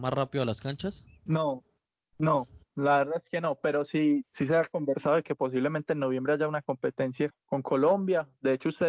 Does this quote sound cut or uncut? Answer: cut